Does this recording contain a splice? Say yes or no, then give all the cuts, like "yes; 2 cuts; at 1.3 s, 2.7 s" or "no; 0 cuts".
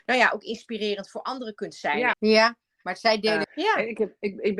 yes; 2 cuts; at 2.1 s, 3.4 s